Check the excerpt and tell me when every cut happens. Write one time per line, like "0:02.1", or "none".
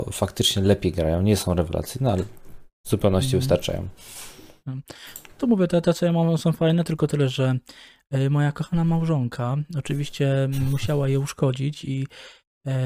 none